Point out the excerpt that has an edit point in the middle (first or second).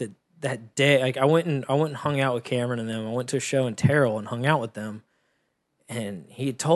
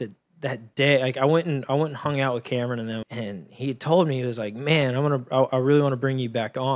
second